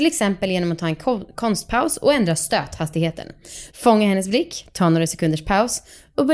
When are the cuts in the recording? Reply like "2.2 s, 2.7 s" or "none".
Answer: 3.7 s